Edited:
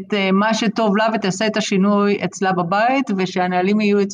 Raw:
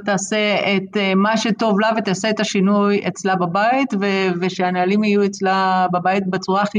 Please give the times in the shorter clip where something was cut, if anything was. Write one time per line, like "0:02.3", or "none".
0:03.2